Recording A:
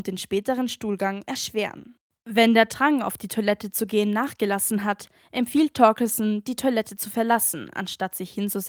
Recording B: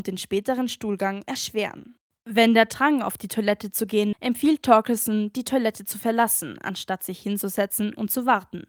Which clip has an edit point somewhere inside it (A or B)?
B